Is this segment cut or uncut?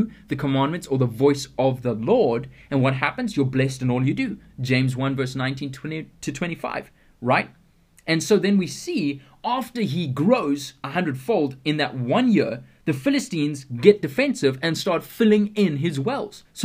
uncut